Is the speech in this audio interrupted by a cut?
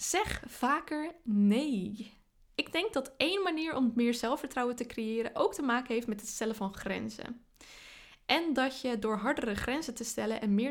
no; 0 cuts

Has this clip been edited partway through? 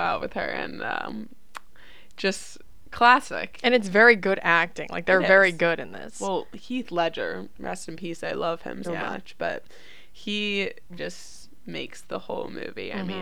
yes; 2 cuts; at 8.8 s, 11.0 s

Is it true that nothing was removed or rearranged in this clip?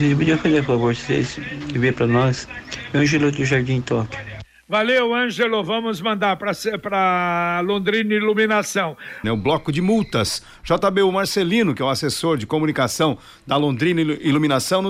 no; 1 cut; at 9.2 s

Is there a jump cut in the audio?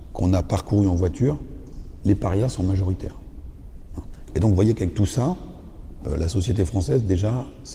yes; 2 cuts; at 4.3 s, 6.0 s

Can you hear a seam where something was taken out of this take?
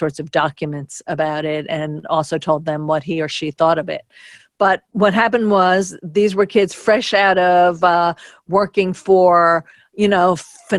no; 0 cuts

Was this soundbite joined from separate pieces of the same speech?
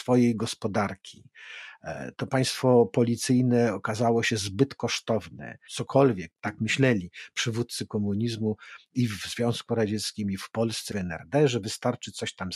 yes; 2 cuts; at 5.7 s, 10.9 s

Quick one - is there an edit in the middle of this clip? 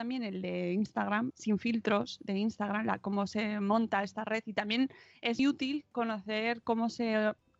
yes; 2 cuts; at 1.3 s, 5.4 s

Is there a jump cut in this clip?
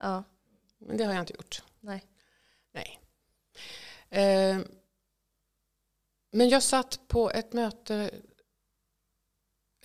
no; 0 cuts

